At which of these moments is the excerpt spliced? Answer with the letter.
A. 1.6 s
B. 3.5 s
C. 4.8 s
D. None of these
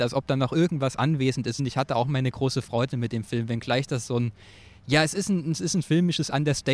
A